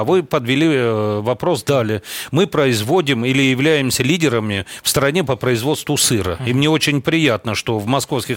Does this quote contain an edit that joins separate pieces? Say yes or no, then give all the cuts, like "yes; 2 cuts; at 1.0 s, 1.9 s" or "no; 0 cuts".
no; 0 cuts